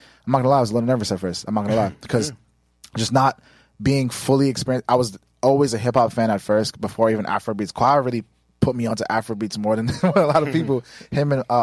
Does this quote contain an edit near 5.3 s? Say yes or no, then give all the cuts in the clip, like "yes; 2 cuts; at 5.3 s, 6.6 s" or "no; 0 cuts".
no; 0 cuts